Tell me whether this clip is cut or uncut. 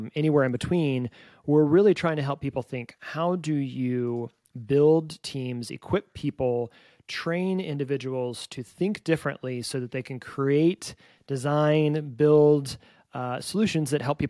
uncut